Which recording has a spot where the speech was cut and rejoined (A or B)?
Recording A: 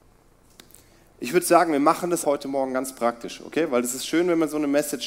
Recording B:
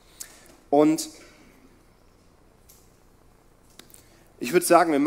A